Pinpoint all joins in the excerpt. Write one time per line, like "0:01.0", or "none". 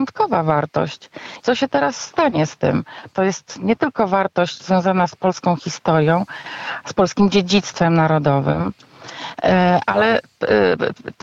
0:01.4
0:03.1

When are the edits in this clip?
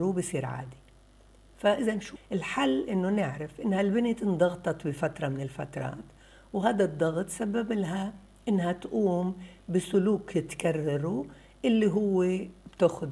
0:02.2

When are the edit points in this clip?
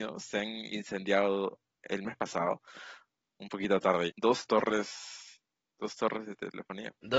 0:04.1

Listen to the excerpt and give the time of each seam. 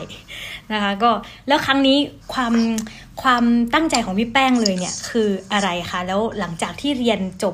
0:02.2

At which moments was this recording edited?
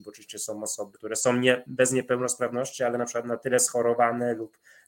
0:00.9

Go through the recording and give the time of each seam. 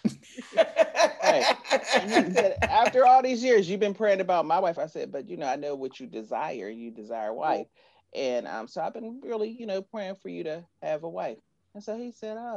0:04.7

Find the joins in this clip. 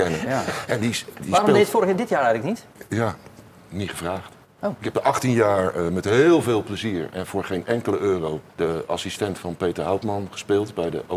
0:08.5

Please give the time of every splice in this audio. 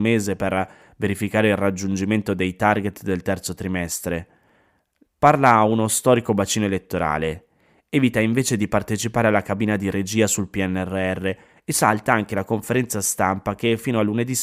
0:05.0

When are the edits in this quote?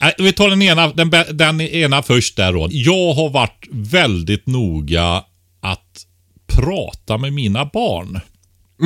0:02.7

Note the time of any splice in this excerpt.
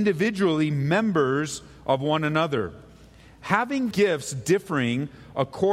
0:03.9

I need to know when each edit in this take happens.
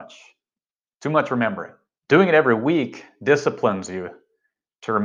0:02.0

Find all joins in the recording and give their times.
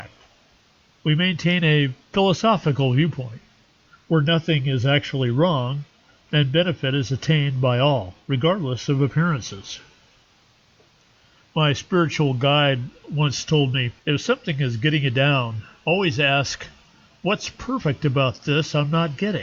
0:14.0

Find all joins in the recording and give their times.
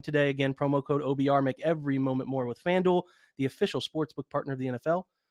none

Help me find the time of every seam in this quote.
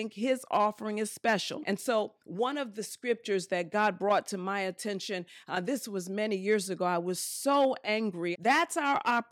0:01.6
0:08.3

